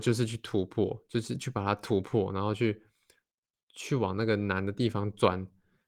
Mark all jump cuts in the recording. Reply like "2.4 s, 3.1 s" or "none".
none